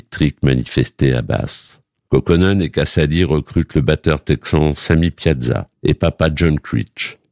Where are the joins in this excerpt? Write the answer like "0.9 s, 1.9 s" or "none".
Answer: 2.1 s, 5.7 s